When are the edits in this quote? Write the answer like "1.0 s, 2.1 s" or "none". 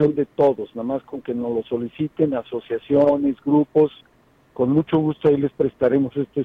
none